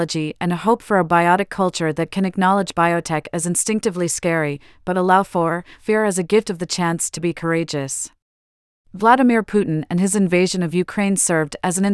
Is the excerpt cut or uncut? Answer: cut